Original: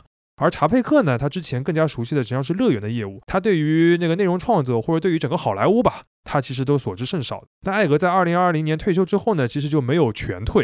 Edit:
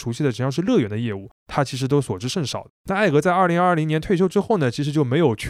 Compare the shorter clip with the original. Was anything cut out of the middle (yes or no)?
yes